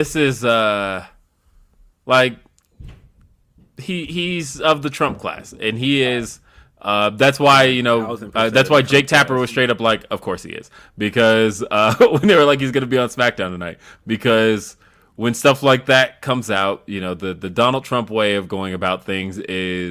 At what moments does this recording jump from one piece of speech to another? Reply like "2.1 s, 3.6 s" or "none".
none